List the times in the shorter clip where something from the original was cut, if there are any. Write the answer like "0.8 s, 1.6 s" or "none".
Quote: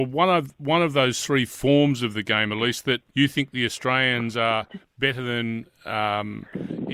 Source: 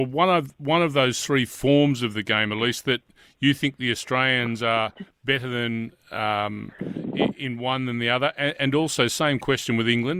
3.1 s